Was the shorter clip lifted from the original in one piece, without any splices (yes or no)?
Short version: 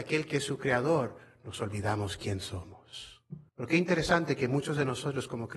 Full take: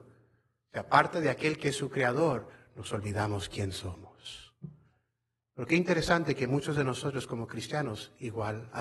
no